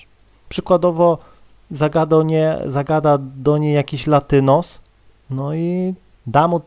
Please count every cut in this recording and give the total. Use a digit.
0